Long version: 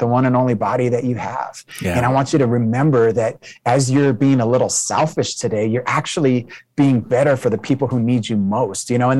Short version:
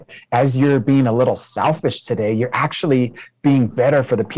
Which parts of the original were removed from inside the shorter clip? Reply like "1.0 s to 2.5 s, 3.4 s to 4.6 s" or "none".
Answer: none